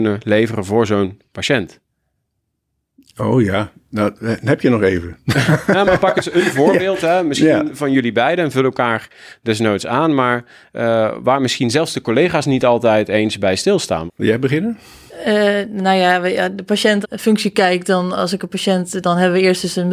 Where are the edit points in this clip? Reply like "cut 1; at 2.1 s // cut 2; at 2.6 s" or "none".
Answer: cut 1; at 14.1 s // cut 2; at 17.0 s